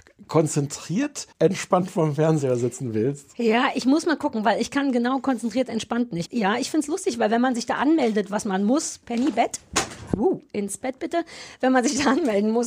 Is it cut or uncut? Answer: cut